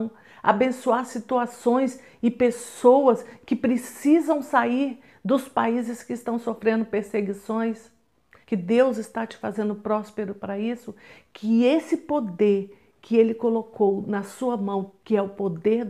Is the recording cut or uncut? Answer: cut